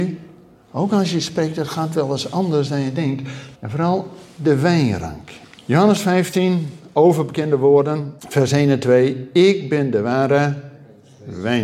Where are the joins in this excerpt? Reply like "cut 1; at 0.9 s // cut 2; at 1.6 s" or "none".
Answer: cut 1; at 3.5 s // cut 2; at 5.6 s // cut 3; at 8.2 s